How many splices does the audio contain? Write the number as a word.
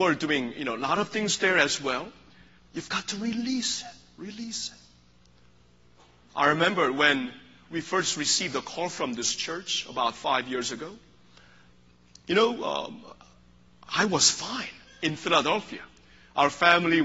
one